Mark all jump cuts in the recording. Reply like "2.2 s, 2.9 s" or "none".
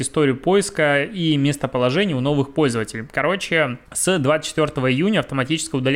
3.9 s